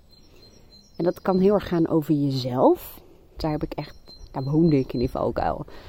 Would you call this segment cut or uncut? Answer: cut